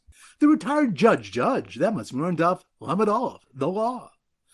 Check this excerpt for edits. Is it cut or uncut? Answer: uncut